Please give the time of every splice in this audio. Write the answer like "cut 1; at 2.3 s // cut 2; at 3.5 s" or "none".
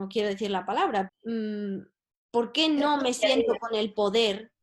cut 1; at 1.1 s